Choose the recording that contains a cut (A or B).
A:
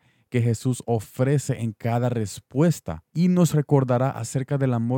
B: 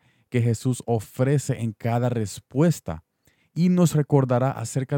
A